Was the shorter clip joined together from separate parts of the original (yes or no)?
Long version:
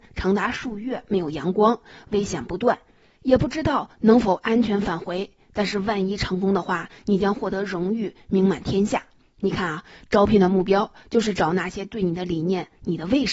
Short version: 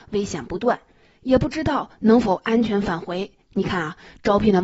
yes